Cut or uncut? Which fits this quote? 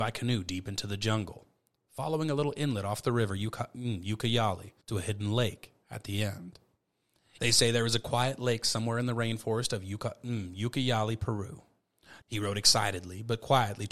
cut